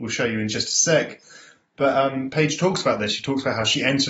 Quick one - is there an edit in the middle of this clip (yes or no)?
no